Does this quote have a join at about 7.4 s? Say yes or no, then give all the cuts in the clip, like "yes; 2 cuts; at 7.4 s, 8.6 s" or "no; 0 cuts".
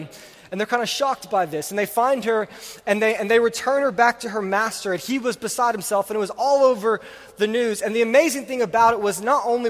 no; 0 cuts